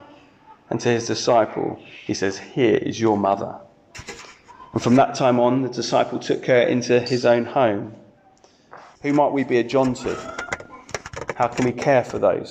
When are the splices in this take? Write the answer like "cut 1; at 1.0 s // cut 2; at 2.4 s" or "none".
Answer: cut 1; at 9.0 s

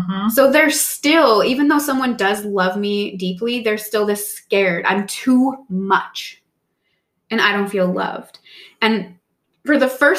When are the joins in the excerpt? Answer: none

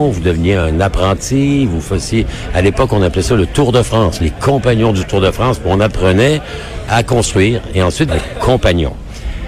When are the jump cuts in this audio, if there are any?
cut 1; at 8.1 s

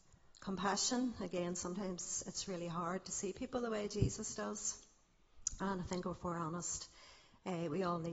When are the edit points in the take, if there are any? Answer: none

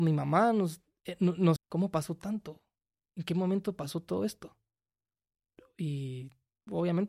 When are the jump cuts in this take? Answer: cut 1; at 1.6 s

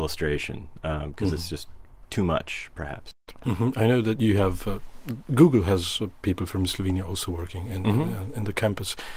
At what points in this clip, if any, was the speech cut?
none

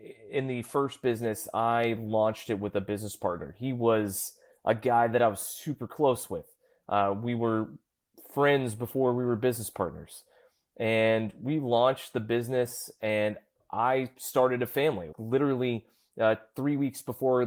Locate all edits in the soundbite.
cut 1; at 15.1 s

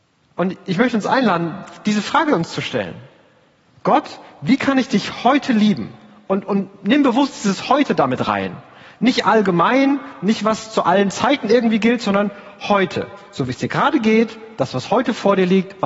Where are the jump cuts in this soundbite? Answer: none

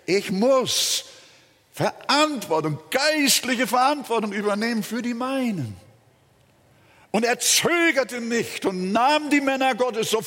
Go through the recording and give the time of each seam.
none

